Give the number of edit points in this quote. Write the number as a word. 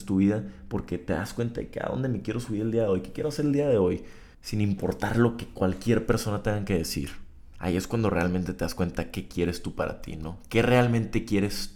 two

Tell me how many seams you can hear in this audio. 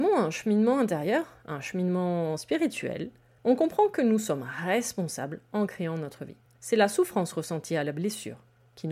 one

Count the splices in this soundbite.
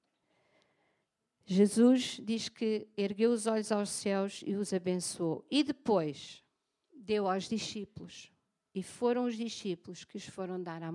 zero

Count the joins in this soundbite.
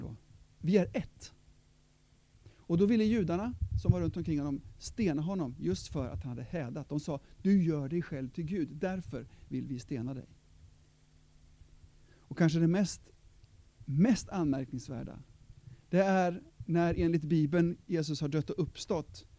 zero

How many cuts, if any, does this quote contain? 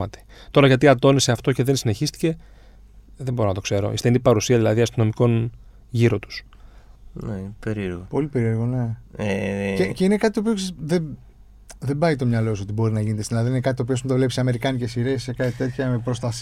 one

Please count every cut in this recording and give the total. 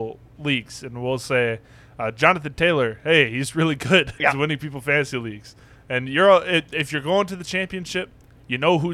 one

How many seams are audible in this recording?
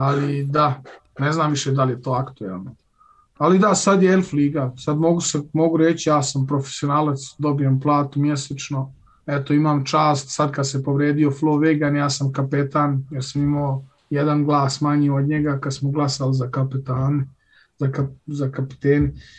zero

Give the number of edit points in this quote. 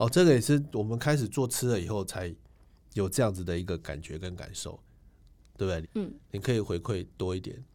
one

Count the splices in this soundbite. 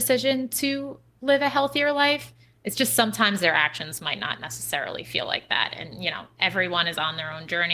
zero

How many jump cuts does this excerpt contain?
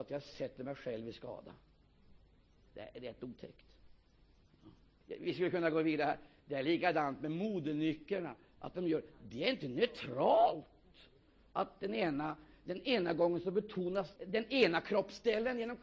two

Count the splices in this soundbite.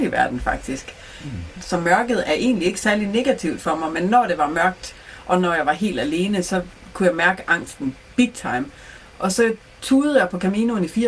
one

